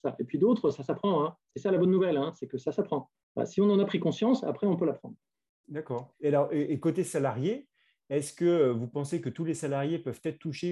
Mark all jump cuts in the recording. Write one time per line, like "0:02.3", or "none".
none